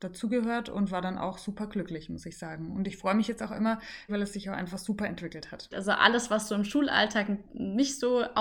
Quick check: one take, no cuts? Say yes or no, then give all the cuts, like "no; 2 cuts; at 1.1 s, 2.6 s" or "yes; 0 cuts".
no; 2 cuts; at 4.1 s, 5.7 s